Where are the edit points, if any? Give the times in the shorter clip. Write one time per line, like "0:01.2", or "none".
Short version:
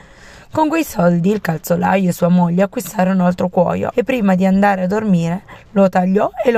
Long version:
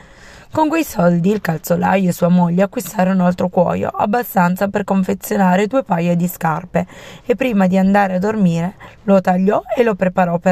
0:03.9